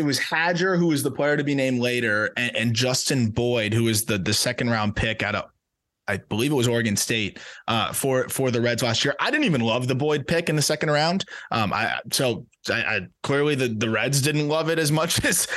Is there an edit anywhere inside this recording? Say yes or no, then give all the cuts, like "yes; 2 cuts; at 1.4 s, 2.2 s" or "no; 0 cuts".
no; 0 cuts